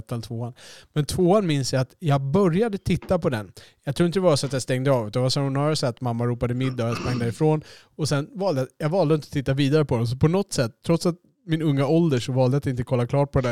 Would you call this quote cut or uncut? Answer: uncut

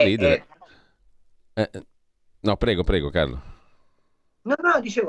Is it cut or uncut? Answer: uncut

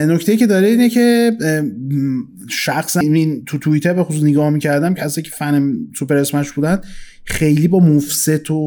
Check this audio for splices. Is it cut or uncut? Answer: cut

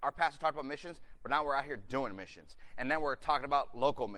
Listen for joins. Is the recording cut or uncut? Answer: uncut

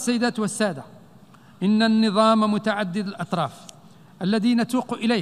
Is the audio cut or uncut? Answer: uncut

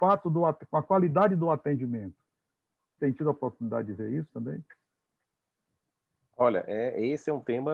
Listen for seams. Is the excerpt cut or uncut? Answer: cut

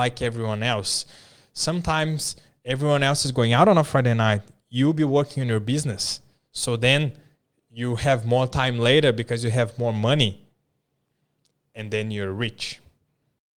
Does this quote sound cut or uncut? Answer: uncut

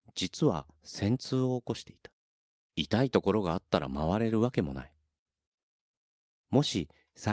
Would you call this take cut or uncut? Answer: cut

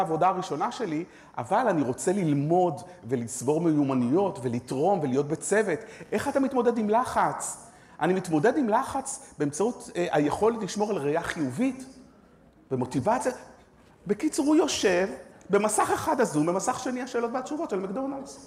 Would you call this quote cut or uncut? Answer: uncut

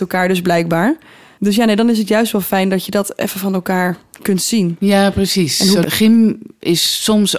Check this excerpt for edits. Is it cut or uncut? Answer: cut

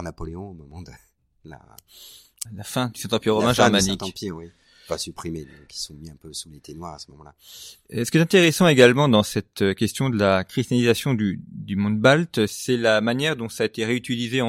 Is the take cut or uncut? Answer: cut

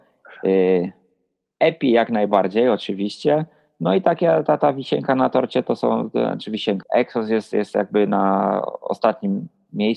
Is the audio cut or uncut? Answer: cut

